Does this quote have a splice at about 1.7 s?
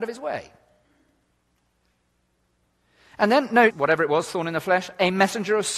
no; 1 cut; at 3.7 s

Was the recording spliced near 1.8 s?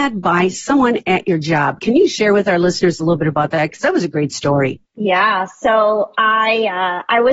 no; 1 cut; at 4.9 s

